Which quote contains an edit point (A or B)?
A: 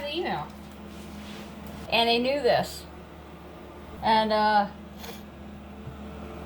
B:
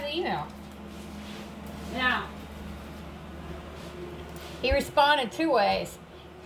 A